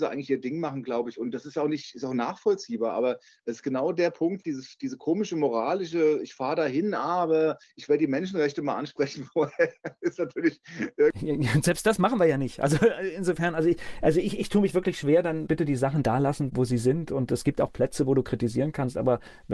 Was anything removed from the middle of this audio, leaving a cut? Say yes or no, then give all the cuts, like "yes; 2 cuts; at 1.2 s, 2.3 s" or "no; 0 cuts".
yes; 1 cut; at 4.4 s